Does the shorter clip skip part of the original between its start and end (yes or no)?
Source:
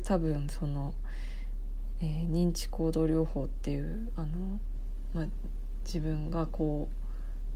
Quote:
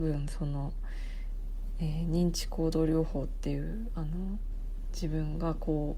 yes